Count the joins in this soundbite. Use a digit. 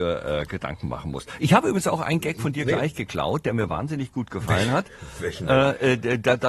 0